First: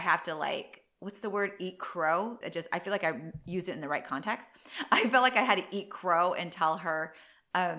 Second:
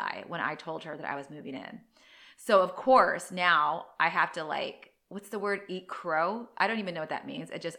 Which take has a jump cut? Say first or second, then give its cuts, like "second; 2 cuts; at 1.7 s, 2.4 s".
first; 1 cut; at 2.4 s